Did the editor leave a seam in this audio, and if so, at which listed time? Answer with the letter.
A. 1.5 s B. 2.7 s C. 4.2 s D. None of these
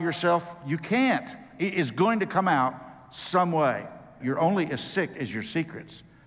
C